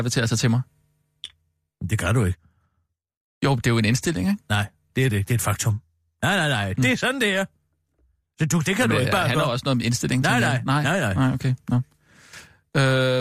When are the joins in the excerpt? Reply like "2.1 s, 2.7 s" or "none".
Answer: 6.7 s